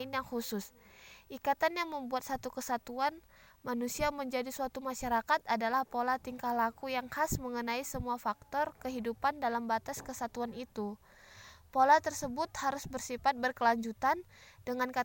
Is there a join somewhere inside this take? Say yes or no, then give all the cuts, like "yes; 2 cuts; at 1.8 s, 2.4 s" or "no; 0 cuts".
no; 0 cuts